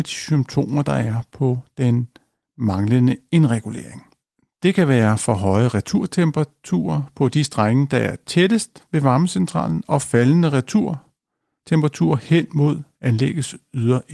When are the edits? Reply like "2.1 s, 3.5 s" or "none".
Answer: none